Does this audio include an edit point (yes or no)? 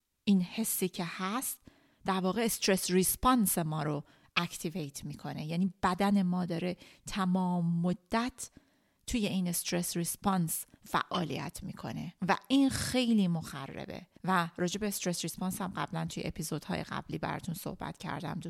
yes